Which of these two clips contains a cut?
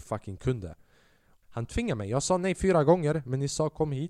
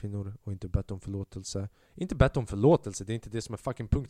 first; 1 cut; at 1.4 s

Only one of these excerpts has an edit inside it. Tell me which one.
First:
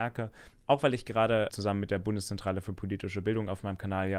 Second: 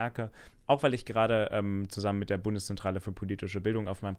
first; 1 cut; at 1.5 s

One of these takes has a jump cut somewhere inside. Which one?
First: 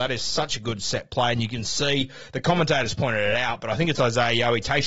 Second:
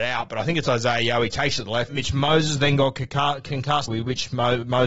second; 2 cuts; at 1.9 s, 3.9 s

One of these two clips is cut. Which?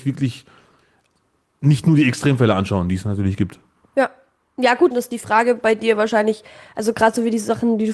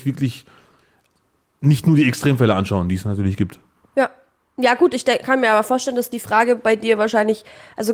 first; 1 cut; at 4.9 s

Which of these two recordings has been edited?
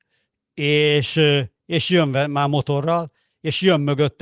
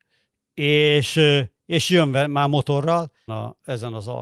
second; 1 cut; at 3.3 s

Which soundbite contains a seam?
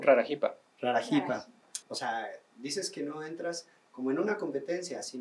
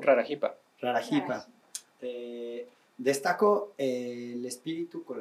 first; 1 cut; at 1.8 s

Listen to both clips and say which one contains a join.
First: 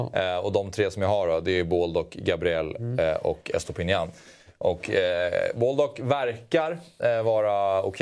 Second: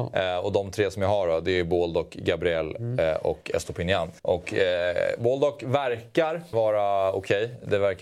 second; 2 cuts; at 4.2 s, 6.5 s

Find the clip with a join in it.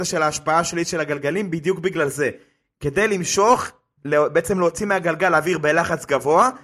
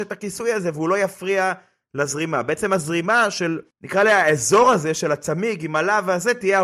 second; 1 cut; at 3.7 s

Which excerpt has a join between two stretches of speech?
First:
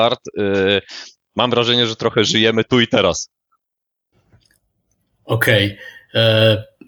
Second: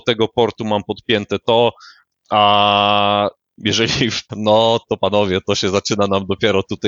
second; 2 cuts; at 2.1 s, 4.3 s

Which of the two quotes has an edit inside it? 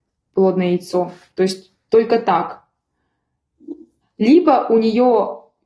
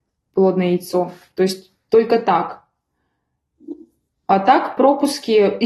first; 1 cut; at 4.0 s

